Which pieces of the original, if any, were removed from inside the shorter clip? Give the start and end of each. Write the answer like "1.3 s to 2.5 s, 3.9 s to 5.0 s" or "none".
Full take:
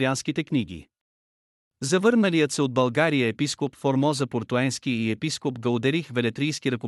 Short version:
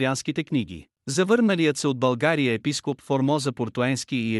1.0 s to 1.7 s